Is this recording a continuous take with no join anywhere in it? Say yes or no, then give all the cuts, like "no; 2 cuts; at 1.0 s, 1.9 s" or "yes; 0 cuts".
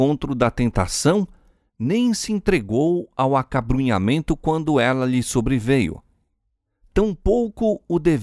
yes; 0 cuts